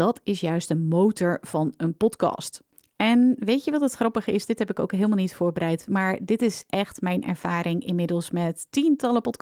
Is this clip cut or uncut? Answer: uncut